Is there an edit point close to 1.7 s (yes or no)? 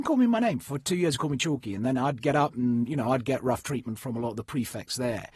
no